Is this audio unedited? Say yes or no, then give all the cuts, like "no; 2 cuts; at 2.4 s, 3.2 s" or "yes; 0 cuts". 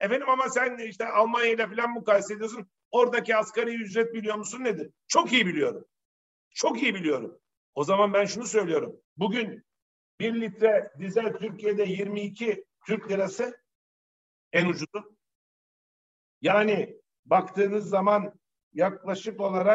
no; 1 cut; at 9.0 s